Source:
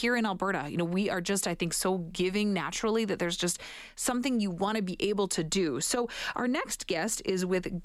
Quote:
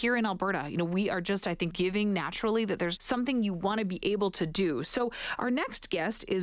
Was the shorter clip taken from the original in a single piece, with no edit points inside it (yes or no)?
no